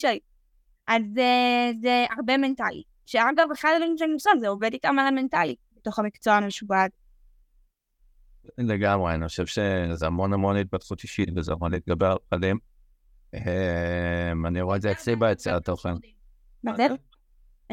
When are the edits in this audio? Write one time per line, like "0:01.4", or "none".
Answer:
none